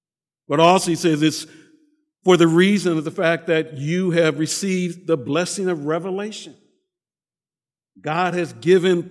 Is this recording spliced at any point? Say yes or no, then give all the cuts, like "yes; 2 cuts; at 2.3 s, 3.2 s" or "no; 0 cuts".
no; 0 cuts